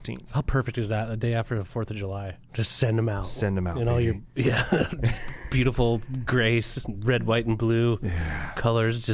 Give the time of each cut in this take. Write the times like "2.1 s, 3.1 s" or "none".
2.5 s